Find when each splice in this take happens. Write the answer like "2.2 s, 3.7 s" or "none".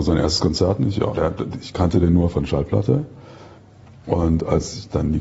1.1 s, 2.3 s

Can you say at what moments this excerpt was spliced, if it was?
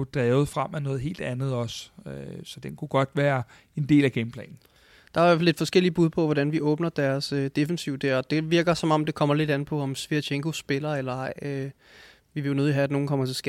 none

